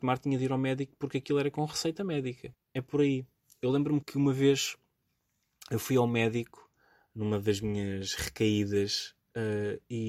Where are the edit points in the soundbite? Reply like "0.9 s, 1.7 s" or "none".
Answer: 2.5 s, 4.0 s